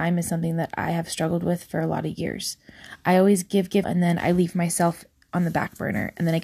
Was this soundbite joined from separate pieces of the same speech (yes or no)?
yes